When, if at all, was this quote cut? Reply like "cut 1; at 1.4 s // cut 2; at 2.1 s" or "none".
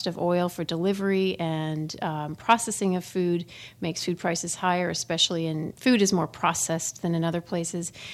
cut 1; at 5.7 s